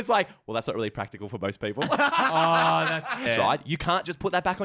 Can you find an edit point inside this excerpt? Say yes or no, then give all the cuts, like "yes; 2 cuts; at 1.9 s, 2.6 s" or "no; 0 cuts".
yes; 1 cut; at 3.3 s